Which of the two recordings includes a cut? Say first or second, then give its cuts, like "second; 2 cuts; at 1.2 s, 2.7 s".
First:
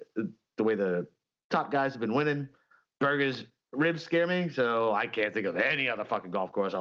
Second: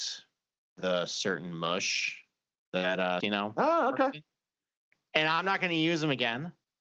second; 1 cut; at 3.2 s